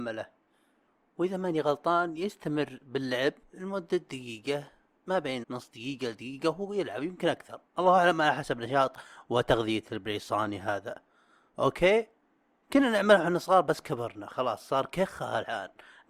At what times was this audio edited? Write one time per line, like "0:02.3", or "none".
0:05.4